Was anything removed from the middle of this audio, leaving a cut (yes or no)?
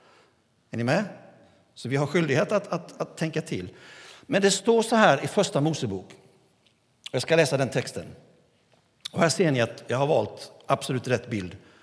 no